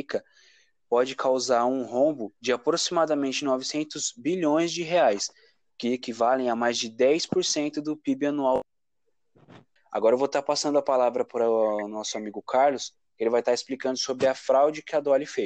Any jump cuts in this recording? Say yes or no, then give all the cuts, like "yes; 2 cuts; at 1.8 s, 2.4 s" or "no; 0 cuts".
no; 0 cuts